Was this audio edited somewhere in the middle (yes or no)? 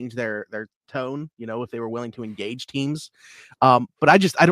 no